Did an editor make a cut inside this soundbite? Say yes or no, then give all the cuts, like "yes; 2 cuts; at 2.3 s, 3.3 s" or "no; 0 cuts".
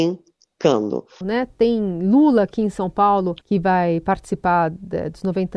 yes; 2 cuts; at 1.2 s, 3.4 s